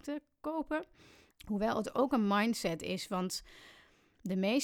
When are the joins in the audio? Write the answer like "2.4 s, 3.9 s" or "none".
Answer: 1.3 s